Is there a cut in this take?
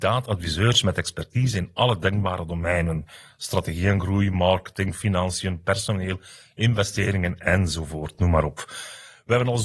no; 0 cuts

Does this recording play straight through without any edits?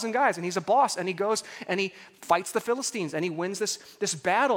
yes; 0 cuts

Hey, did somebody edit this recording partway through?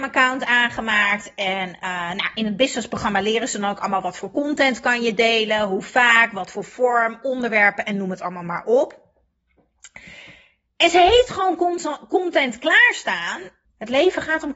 yes; 1 cut; at 13.6 s

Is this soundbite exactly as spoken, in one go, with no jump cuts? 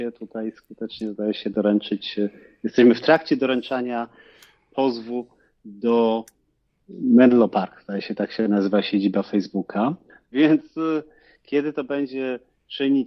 yes; 0 cuts

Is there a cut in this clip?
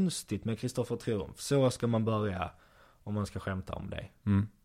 no; 0 cuts

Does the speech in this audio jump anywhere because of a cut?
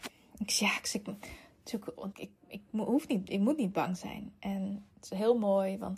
yes; 1 cut; at 2.1 s

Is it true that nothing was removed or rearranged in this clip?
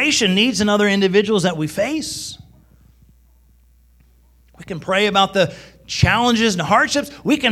yes; 0 cuts

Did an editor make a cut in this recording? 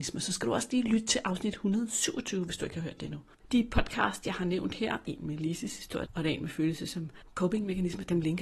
yes; 3 cuts; at 3.5 s, 5.0 s, 6.1 s

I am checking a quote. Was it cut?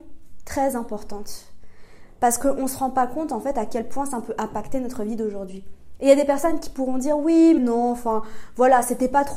yes; 1 cut; at 7.6 s

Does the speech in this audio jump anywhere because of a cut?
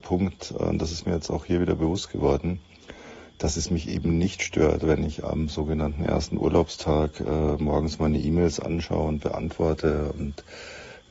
no; 0 cuts

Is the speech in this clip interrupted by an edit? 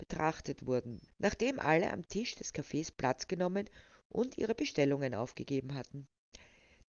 yes; 1 cut; at 1.1 s

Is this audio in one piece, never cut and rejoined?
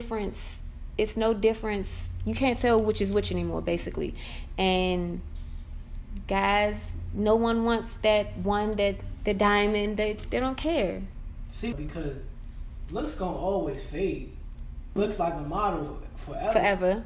no; 2 cuts; at 11.7 s, 15.0 s

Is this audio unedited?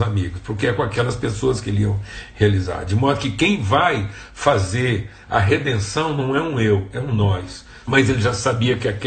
no; 1 cut; at 7.8 s

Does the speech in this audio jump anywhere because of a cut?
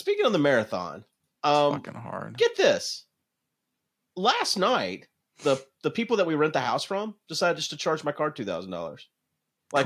no; 0 cuts

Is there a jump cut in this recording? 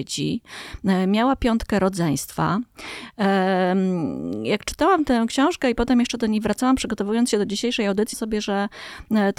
yes; 1 cut; at 8.1 s

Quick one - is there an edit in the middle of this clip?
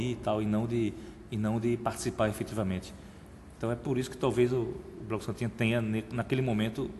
no; 0 cuts

